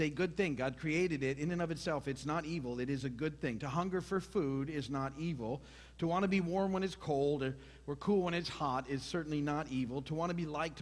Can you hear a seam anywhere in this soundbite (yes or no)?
no